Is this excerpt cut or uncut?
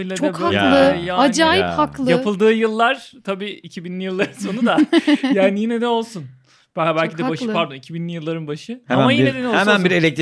uncut